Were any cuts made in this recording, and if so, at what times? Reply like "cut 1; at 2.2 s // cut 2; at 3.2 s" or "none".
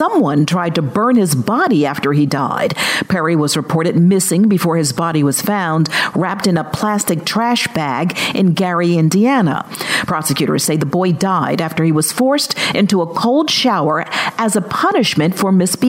none

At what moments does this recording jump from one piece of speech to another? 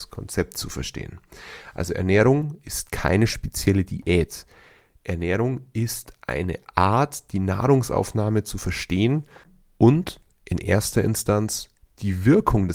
none

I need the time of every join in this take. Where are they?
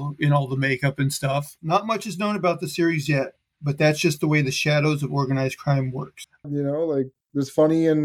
cut 1; at 1.6 s // cut 2; at 6.4 s

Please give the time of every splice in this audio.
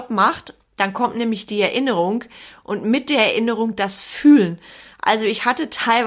none

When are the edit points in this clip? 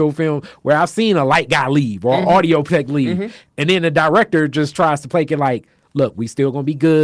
none

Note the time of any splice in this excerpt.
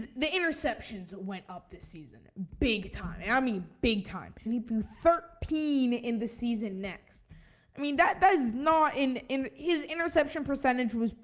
cut 1; at 4.5 s

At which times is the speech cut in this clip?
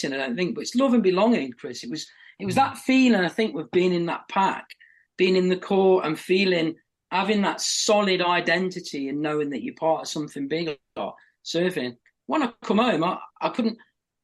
none

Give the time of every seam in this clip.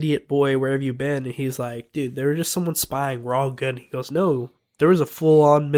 none

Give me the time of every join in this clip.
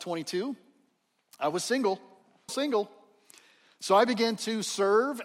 cut 1; at 2.5 s

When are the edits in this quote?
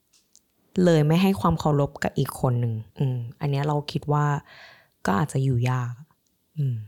cut 1; at 2.9 s

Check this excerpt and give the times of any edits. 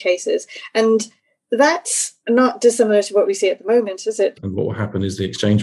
cut 1; at 4.3 s

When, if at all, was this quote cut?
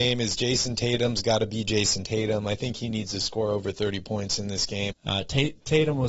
cut 1; at 4.9 s

